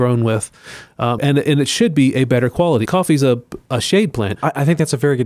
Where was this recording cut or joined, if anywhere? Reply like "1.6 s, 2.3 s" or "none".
1.2 s, 2.9 s, 4.4 s